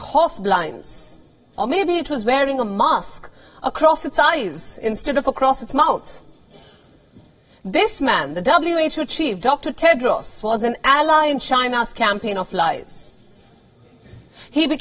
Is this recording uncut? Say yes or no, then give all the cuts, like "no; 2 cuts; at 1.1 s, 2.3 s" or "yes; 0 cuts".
yes; 0 cuts